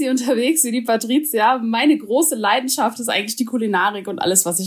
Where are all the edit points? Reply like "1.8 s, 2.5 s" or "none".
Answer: none